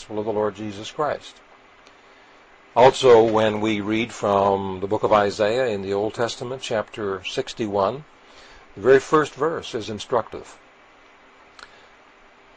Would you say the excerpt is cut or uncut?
uncut